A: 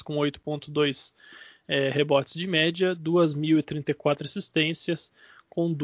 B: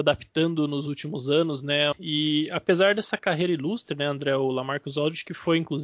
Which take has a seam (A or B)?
B